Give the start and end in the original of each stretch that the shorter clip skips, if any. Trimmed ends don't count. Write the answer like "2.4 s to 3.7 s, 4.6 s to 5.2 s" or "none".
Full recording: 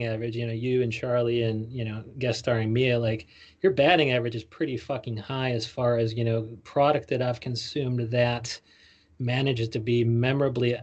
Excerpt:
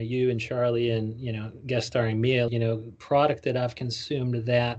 3.0 s to 6.1 s